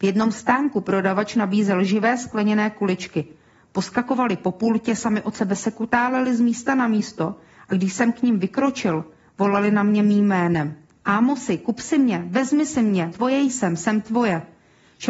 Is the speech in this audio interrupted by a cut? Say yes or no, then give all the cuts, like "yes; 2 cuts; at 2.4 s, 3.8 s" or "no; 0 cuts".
yes; 1 cut; at 13.1 s